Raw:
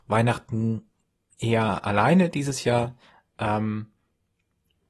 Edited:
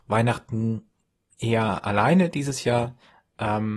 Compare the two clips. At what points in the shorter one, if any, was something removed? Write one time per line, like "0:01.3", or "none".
none